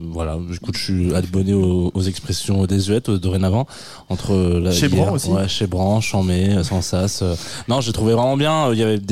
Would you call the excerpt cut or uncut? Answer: uncut